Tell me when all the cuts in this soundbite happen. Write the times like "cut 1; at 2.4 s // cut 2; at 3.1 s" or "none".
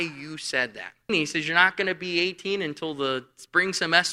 cut 1; at 1.1 s

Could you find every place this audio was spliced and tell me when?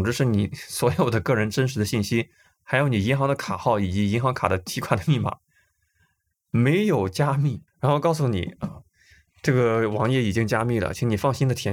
cut 1; at 7.7 s

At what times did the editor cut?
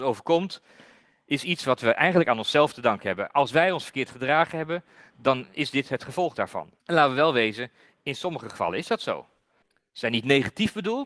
cut 1; at 6.8 s // cut 2; at 9.6 s

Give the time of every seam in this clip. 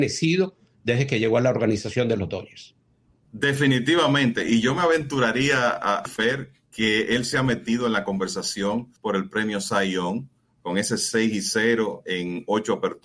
cut 1; at 6.1 s // cut 2; at 9.0 s

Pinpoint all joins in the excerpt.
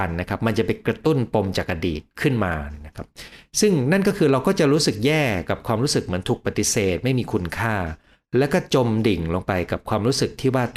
none

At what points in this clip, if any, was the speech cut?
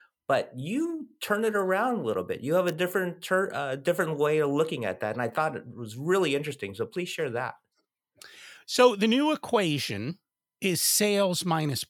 none

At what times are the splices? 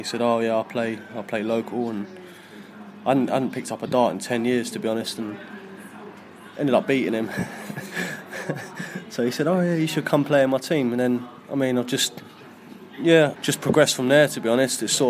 cut 1; at 13.3 s

